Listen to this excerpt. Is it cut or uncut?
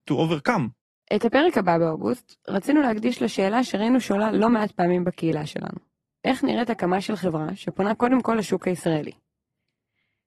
uncut